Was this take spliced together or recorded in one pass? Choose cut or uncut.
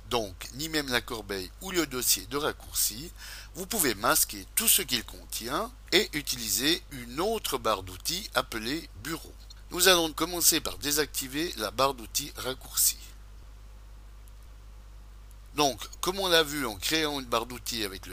cut